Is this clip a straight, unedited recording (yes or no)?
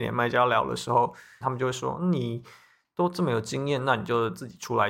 no